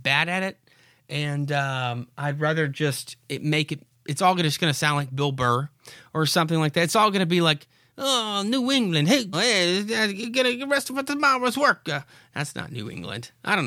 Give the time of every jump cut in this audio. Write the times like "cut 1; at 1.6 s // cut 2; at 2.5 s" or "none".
cut 1; at 9.3 s